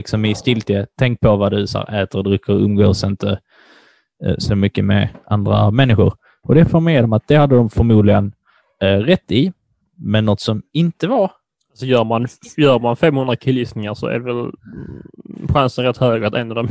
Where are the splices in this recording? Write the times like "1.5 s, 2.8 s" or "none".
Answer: none